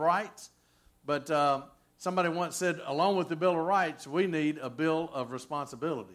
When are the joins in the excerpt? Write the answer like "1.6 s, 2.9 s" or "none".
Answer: none